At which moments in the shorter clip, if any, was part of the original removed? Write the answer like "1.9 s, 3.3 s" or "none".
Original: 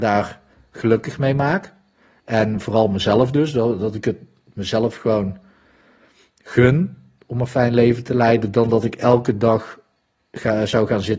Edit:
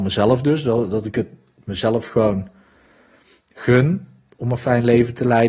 none